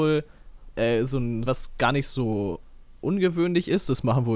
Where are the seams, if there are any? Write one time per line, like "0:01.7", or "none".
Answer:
0:01.5